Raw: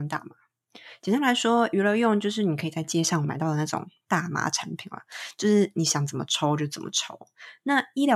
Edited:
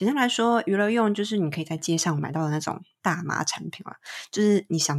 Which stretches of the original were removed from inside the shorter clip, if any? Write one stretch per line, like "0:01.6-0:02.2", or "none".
none